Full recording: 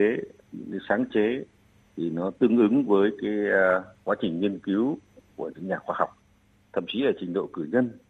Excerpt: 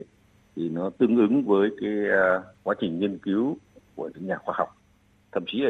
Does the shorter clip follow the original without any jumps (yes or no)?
yes